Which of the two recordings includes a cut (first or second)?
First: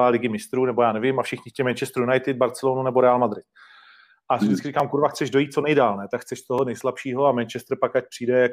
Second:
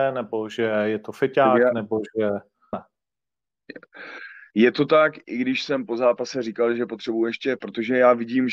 second